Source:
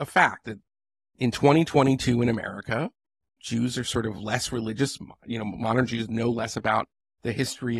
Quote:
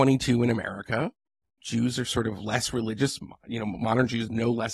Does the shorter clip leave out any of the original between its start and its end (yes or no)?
no